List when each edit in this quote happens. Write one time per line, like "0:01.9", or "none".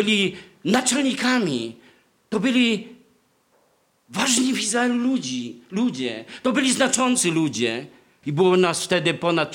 0:08.2